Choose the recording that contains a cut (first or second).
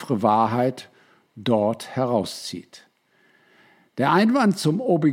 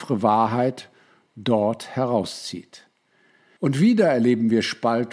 second